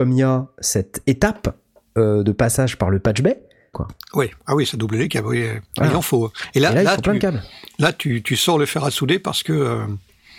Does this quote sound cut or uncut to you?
cut